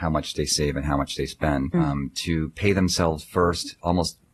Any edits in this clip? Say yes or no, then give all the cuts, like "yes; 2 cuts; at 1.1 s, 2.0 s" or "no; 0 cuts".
yes; 1 cut; at 1.7 s